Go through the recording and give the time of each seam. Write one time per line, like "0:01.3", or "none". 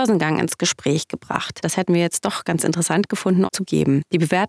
0:01.6
0:03.5